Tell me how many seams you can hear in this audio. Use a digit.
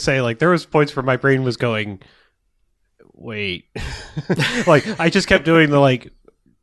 0